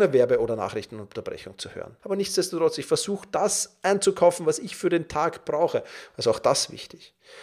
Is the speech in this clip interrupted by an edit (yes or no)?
yes